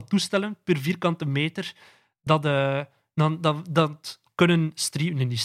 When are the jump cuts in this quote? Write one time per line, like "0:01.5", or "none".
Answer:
none